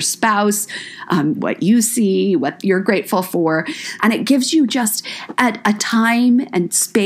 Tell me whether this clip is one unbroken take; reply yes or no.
no